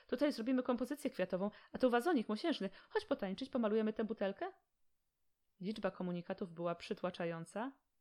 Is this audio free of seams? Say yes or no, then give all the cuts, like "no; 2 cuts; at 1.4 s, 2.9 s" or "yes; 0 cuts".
yes; 0 cuts